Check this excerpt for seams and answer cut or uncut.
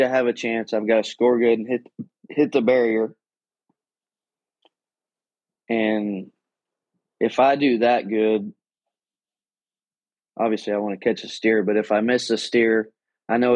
uncut